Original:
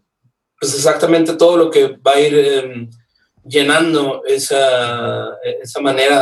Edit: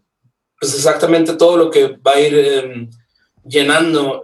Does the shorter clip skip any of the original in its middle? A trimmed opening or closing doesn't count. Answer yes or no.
no